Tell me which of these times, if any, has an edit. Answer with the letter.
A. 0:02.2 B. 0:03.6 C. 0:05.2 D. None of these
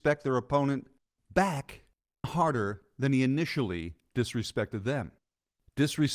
A